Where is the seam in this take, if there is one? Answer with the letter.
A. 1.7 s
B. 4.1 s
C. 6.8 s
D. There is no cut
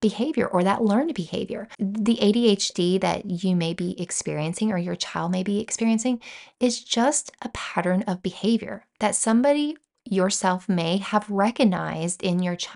A